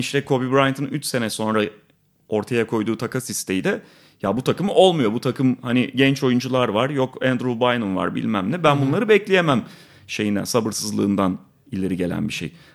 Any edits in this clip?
no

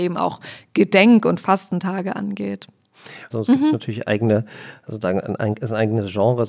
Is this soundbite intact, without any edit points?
no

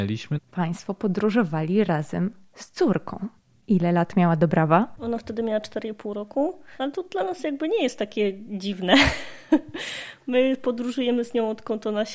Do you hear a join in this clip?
no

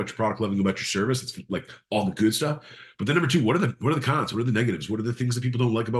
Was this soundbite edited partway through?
no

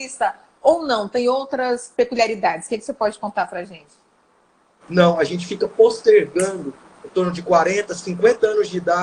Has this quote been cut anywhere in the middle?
yes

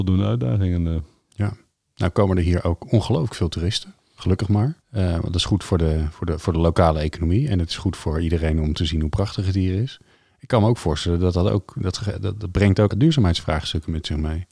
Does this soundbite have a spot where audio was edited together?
yes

